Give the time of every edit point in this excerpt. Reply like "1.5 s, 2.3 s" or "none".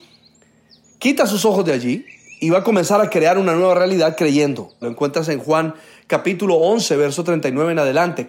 4.8 s